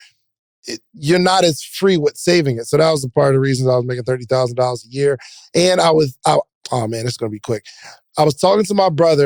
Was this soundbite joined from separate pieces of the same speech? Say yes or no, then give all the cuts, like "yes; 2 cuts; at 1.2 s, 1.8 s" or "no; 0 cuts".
yes; 1 cut; at 6.5 s